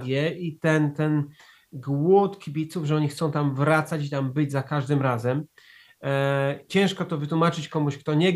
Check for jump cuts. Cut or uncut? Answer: cut